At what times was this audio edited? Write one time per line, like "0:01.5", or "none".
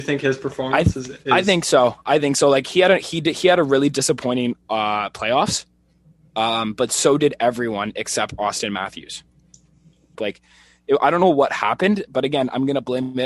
0:10.2